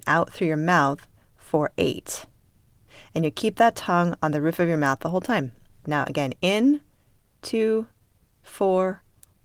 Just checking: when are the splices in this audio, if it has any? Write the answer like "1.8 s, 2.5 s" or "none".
5.8 s, 8.4 s